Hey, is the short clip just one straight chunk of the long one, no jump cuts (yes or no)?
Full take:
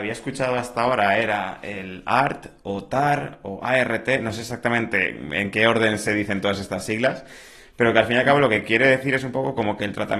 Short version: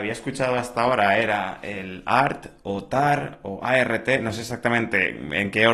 yes